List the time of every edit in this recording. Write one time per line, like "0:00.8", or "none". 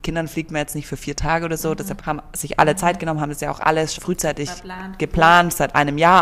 0:02.0
0:04.0